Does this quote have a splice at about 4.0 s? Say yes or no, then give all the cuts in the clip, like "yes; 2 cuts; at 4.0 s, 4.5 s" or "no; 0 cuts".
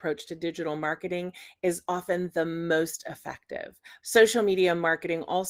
yes; 1 cut; at 4.0 s